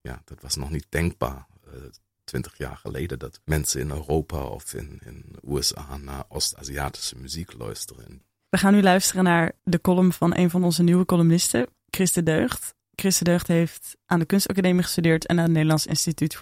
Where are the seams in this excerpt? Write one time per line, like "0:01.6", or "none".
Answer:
0:03.4